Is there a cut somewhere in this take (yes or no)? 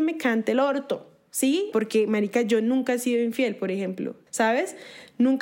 yes